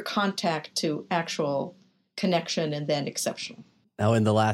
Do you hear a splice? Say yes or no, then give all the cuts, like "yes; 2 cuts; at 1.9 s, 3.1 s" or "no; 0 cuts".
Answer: no; 0 cuts